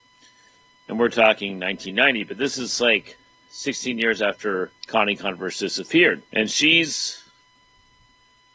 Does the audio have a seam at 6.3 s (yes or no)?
yes